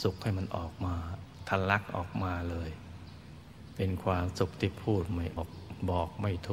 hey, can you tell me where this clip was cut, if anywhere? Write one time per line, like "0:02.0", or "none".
0:05.4